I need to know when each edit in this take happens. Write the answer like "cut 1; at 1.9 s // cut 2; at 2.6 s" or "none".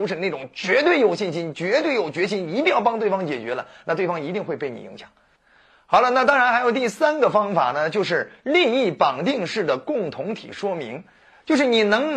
none